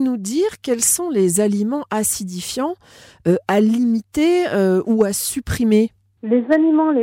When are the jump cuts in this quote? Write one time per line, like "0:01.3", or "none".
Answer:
none